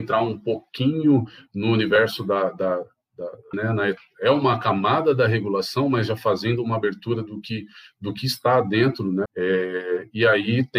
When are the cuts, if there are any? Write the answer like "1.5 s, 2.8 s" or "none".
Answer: 3.5 s, 9.3 s